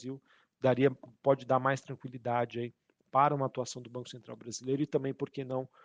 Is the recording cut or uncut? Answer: uncut